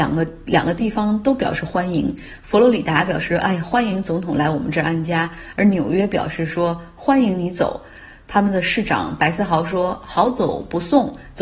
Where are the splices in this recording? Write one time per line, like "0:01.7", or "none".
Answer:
none

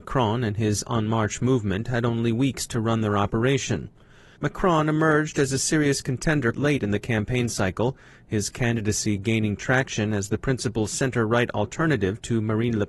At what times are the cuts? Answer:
0:04.4
0:06.5

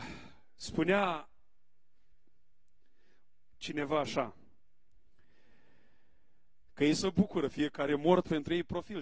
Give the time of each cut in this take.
0:06.7

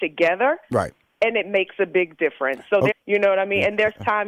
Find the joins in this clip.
0:02.9

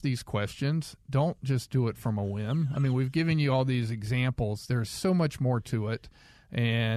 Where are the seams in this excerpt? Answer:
none

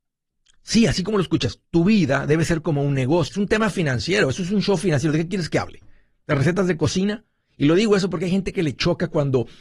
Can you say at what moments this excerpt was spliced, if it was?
0:03.3

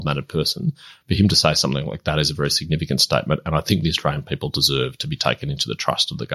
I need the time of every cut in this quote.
none

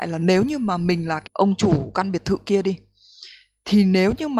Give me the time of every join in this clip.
0:01.3

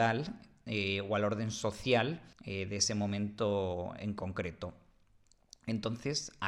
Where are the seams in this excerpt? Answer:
0:02.3

